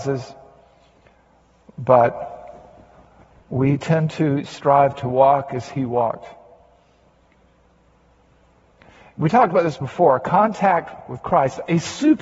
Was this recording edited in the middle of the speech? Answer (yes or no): no